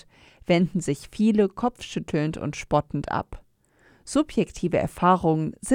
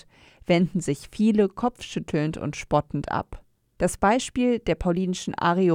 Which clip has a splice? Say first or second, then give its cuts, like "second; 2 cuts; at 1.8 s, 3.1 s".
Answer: second; 1 cut; at 3.6 s